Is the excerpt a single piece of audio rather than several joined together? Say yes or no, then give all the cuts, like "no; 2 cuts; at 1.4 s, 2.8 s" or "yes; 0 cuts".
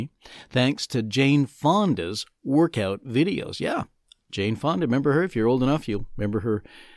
yes; 0 cuts